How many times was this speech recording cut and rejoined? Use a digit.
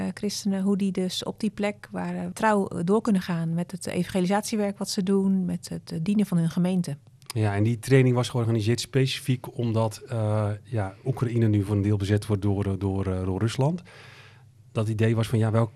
1